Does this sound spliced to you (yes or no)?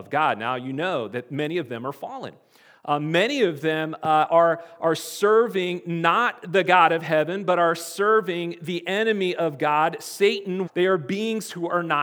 yes